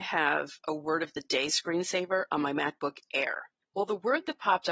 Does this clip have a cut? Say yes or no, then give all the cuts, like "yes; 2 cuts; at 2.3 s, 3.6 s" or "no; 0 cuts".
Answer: no; 0 cuts